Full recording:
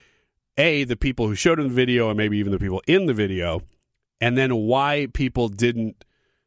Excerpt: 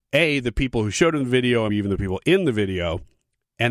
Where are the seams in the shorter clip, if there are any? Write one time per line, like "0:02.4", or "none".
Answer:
0:01.7